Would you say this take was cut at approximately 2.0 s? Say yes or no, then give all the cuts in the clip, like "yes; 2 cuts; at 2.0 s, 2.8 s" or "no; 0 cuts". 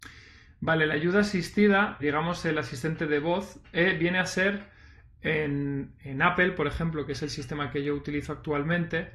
yes; 1 cut; at 2.0 s